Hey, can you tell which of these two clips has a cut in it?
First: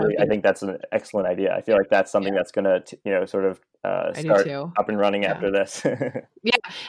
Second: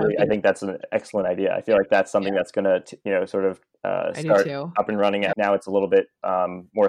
second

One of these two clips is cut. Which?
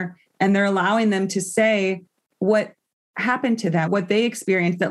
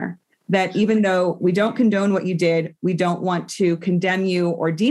first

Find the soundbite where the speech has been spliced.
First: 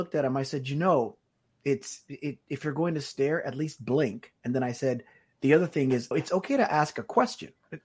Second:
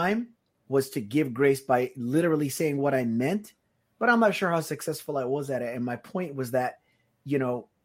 first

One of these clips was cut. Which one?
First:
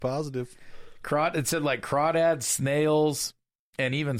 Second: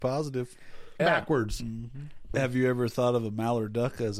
second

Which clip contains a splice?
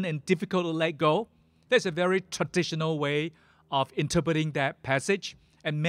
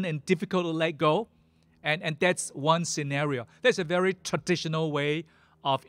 first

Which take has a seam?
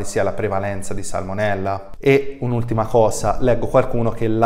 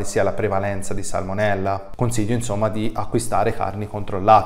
first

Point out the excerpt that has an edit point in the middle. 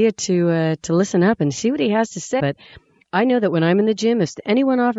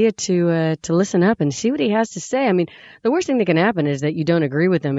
first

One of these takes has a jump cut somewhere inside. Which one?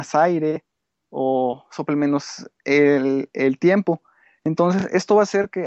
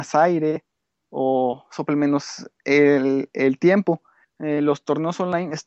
second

